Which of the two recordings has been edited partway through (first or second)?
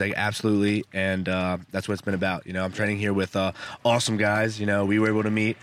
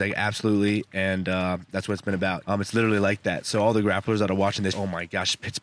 second